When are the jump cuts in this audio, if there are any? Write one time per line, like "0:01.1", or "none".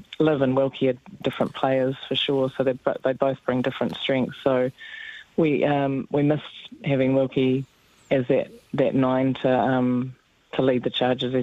0:01.2